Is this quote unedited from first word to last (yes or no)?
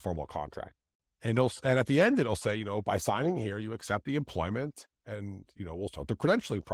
yes